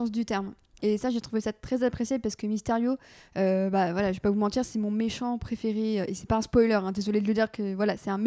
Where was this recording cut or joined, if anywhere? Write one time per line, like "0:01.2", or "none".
none